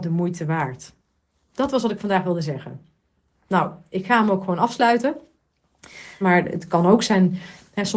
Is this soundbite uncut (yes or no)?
no